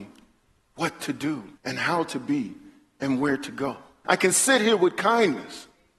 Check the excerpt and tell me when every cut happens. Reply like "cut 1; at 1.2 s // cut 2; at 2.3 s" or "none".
cut 1; at 1.6 s // cut 2; at 4.0 s